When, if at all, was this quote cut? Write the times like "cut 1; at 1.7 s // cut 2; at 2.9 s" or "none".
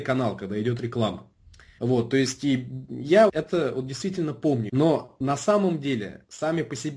cut 1; at 1.8 s // cut 2; at 3.3 s // cut 3; at 4.7 s

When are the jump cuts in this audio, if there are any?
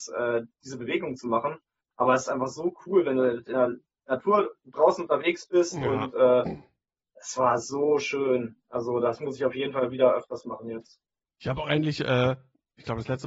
none

